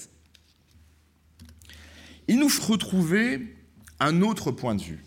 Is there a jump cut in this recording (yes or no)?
yes